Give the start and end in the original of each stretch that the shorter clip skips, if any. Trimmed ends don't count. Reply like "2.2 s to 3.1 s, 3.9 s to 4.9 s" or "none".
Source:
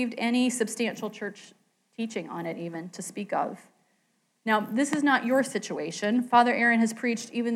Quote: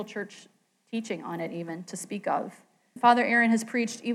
4.0 s to 6.3 s